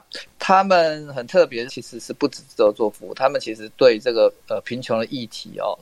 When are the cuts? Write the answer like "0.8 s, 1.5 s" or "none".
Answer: 1.7 s